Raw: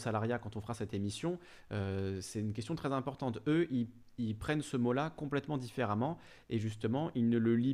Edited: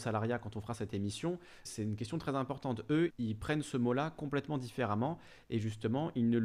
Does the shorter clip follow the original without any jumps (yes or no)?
no